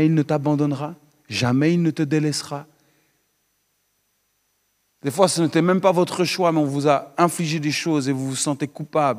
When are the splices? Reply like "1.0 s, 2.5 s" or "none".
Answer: 4.9 s